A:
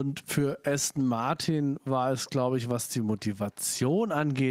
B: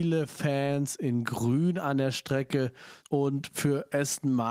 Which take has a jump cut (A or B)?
B